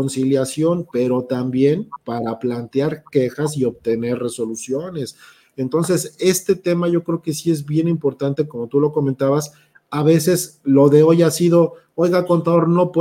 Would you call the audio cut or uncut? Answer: uncut